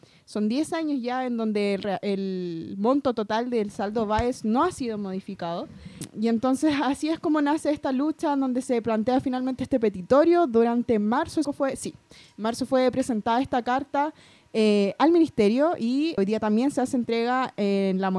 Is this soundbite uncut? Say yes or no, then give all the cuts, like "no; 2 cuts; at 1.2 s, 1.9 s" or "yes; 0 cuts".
no; 2 cuts; at 11.4 s, 16.2 s